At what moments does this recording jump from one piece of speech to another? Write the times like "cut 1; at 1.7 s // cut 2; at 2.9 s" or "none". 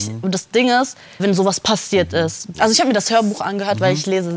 cut 1; at 1.2 s // cut 2; at 2.5 s

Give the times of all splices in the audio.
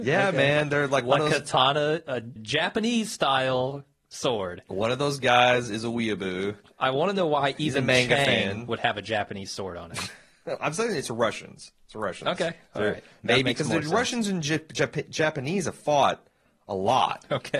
cut 1; at 2.4 s

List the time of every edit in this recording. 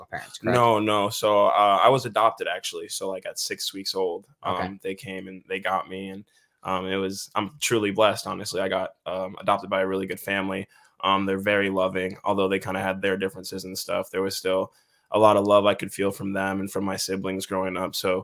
none

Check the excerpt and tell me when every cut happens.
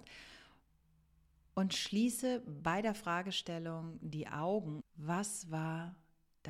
cut 1; at 4.8 s

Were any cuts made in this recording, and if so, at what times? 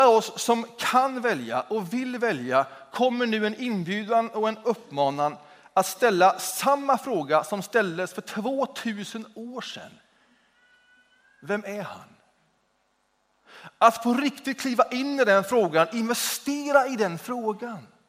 none

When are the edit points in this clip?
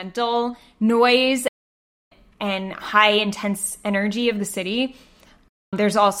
none

